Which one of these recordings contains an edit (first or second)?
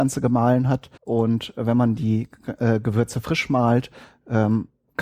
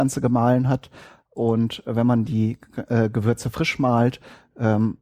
first